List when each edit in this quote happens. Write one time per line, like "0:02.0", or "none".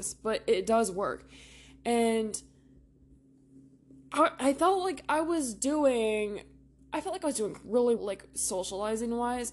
0:08.0